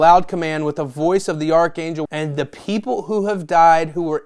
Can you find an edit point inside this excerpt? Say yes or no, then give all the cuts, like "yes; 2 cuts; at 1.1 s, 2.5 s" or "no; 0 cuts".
yes; 1 cut; at 2.1 s